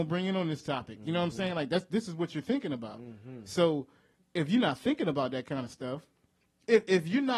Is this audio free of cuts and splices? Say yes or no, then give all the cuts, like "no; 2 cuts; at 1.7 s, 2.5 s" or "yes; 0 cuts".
yes; 0 cuts